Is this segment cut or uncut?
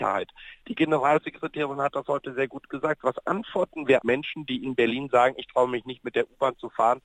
cut